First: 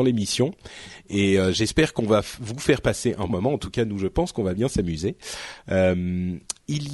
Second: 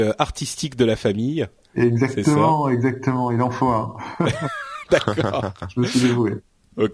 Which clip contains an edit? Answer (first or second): first